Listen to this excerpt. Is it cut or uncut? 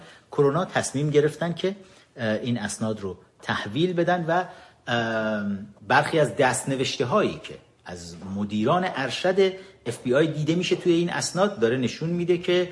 cut